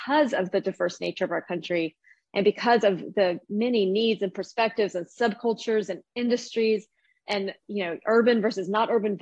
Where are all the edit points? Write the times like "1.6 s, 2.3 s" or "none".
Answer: none